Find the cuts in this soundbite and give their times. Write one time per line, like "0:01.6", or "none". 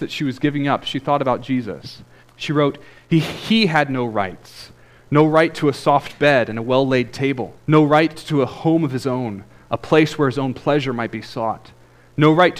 0:02.2
0:07.6

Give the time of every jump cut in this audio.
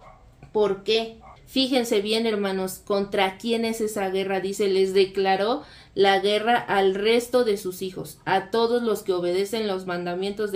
0:01.4

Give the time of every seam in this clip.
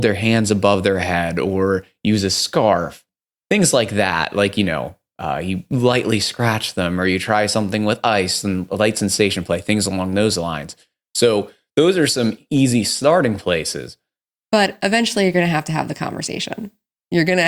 none

